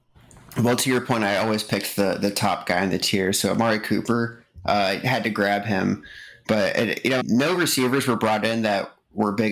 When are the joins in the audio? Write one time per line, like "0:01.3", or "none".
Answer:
0:07.2